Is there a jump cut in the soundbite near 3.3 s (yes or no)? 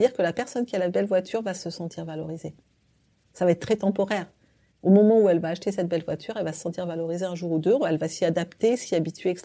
no